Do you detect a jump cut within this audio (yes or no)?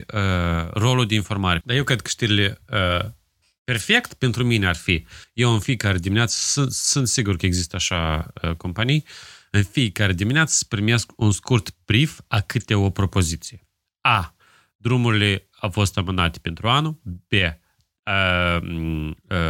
yes